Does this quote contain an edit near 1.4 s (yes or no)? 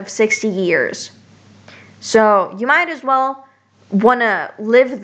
no